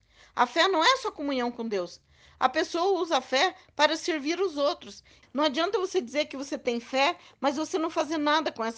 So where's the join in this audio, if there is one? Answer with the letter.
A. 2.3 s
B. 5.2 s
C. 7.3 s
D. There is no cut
B